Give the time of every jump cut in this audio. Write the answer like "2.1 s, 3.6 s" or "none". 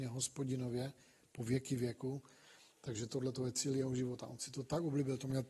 none